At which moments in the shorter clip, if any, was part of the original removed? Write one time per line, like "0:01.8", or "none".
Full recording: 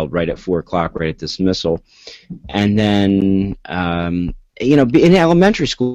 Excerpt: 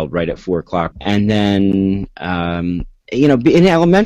0:00.9